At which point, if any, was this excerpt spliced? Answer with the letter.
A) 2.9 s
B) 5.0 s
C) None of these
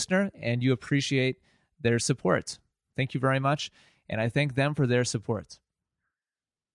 A